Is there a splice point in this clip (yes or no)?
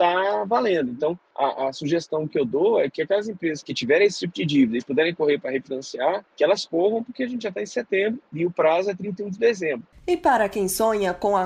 no